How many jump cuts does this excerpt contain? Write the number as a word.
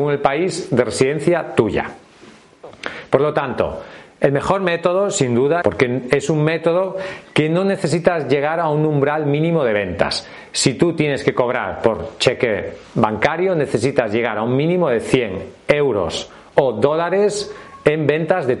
one